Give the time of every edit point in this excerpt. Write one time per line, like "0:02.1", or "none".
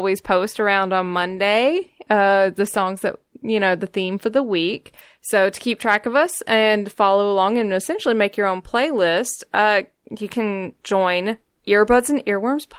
none